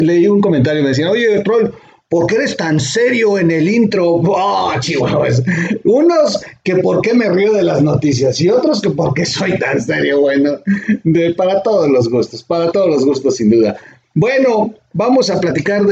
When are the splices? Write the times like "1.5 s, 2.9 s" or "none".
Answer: none